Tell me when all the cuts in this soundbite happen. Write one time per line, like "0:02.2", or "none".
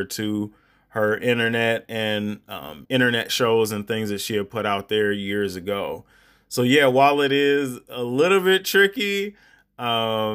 0:02.9